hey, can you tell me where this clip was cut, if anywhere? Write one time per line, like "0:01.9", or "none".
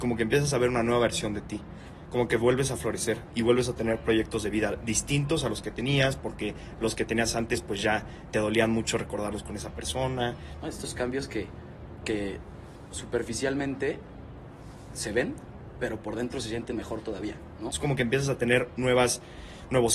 0:10.6
0:17.7